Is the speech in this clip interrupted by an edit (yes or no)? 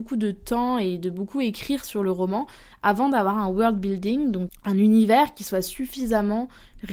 yes